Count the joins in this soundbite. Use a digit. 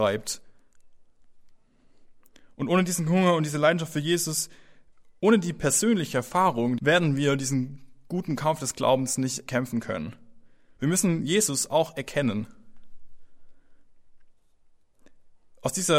2